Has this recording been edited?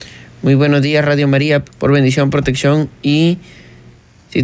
yes; 1 cut; at 1.6 s

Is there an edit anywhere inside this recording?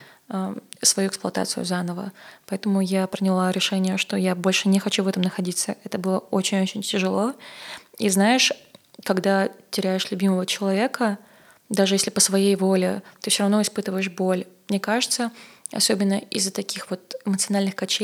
no; 0 cuts

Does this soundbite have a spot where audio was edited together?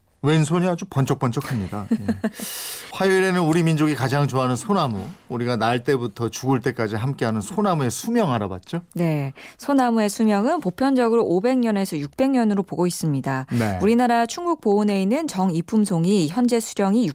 no; 0 cuts

